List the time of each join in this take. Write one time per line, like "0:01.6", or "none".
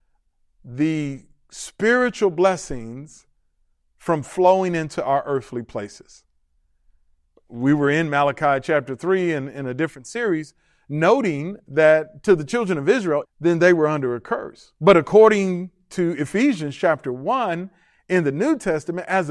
0:13.2
0:14.8